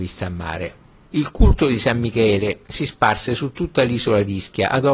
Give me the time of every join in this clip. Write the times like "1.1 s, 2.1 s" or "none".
1.1 s, 2.6 s

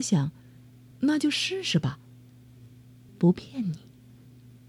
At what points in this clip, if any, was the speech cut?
0.9 s, 3.1 s

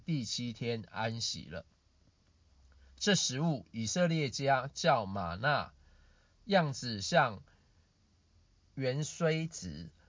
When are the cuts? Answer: none

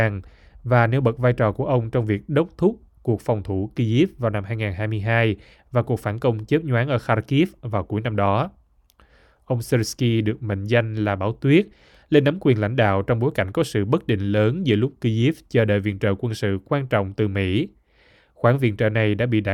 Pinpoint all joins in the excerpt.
none

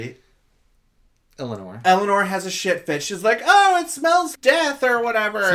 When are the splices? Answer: 4.3 s

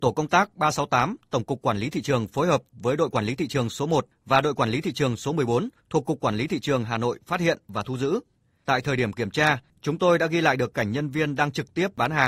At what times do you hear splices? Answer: none

